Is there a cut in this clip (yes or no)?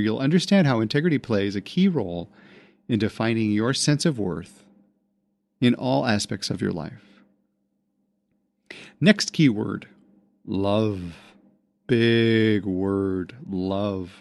no